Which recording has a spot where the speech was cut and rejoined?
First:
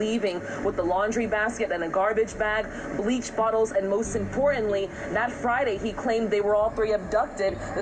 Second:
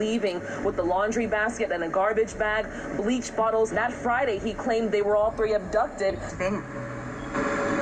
second; 2 cuts; at 3.7 s, 6.3 s

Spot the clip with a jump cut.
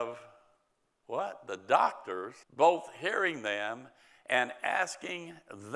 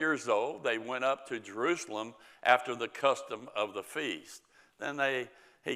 first; 1 cut; at 2.4 s

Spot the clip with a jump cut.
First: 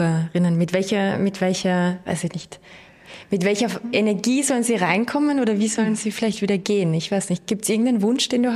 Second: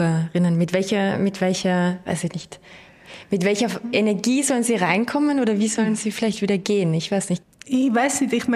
second; 1 cut; at 7.4 s

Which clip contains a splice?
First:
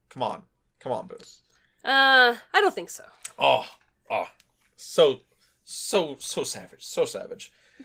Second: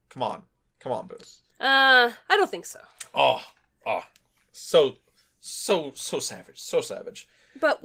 second; 1 cut; at 1.5 s

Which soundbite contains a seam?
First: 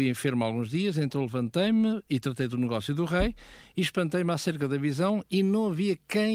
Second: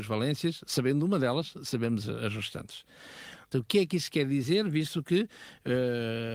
second; 1 cut; at 3.5 s

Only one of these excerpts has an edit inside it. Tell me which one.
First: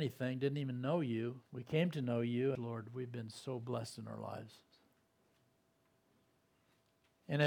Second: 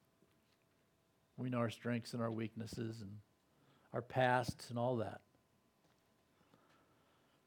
first; 2 cuts; at 1.5 s, 2.6 s

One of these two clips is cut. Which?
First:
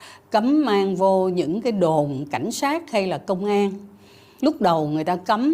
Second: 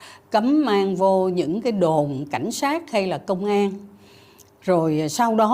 first; 1 cut; at 4.4 s

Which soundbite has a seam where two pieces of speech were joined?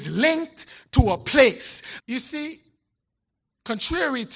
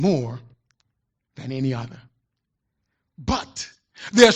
first; 1 cut; at 2.0 s

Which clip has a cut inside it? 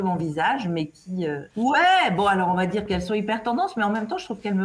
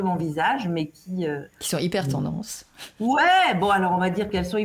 first; 1 cut; at 1.5 s

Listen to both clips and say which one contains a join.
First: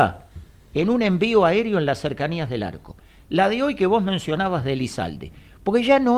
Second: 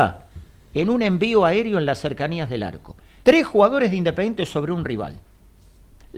second; 1 cut; at 3.2 s

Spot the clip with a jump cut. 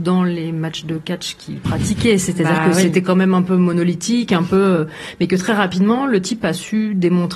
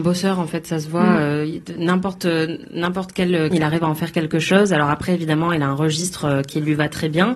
second; 1 cut; at 3.5 s

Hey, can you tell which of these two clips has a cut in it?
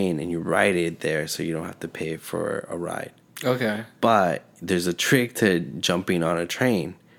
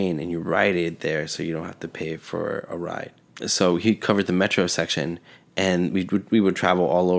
second; 1 cut; at 3.4 s

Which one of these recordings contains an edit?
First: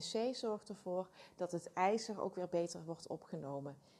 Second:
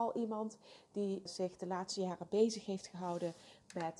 second; 1 cut; at 1.3 s

